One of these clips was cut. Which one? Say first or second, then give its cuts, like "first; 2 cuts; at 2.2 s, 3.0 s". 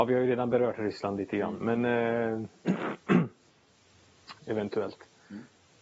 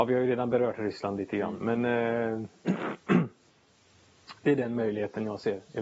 first; 1 cut; at 4.4 s